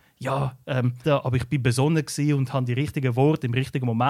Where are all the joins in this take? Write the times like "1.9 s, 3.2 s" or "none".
1.0 s